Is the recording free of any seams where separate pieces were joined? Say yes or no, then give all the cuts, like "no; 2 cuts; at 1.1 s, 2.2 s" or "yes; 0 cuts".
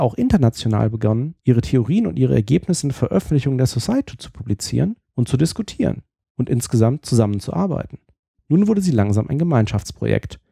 no; 2 cuts; at 1.4 s, 8.4 s